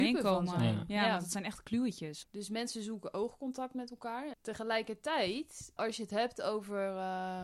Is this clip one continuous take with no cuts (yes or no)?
no